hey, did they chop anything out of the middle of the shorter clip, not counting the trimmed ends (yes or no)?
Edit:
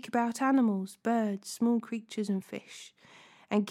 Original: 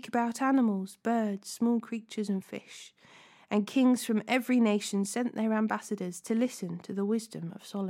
no